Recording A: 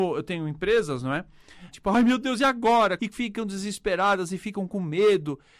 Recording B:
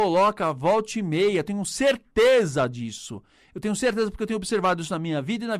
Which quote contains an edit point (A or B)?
A